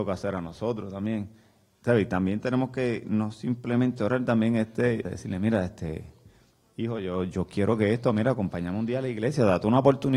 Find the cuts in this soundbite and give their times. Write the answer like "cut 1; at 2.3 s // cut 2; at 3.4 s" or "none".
cut 1; at 5.0 s